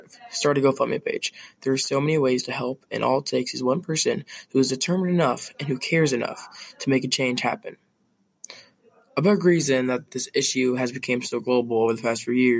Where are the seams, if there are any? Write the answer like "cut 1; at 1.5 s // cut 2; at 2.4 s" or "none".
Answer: none